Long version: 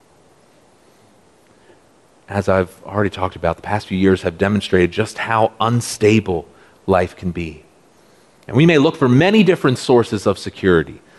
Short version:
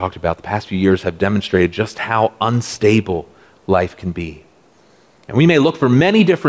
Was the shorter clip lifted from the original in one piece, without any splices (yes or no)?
yes